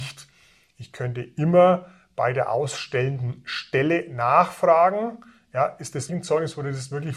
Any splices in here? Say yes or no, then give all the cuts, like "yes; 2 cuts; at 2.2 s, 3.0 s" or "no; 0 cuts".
yes; 1 cut; at 6.1 s